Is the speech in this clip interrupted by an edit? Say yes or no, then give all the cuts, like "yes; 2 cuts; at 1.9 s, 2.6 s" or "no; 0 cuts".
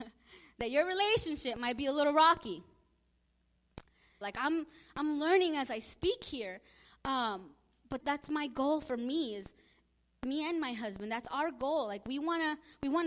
yes; 2 cuts; at 4.2 s, 8.0 s